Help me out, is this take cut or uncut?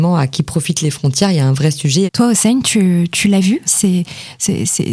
cut